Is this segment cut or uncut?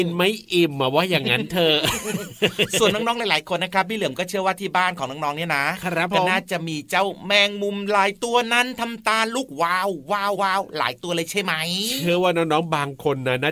cut